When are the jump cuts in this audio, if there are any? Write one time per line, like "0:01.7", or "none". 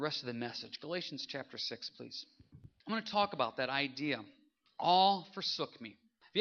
none